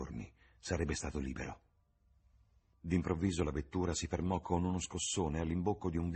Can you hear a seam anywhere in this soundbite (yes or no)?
no